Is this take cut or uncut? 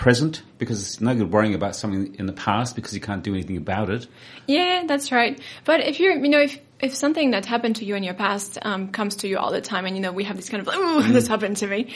uncut